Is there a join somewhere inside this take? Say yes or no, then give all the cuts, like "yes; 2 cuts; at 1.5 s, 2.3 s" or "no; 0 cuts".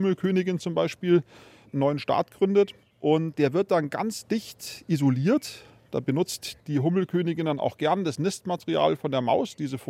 no; 0 cuts